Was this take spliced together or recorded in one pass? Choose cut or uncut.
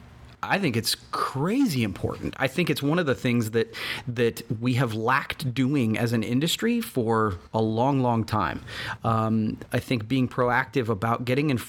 uncut